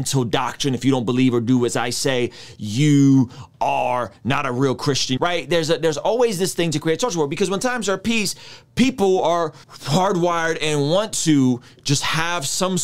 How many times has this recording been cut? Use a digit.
2